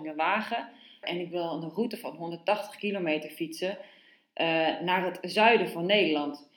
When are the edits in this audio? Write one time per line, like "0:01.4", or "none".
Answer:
0:01.0